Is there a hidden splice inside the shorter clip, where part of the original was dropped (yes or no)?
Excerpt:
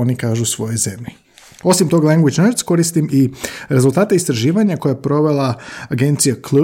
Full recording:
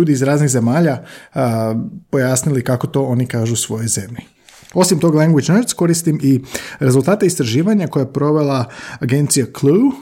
no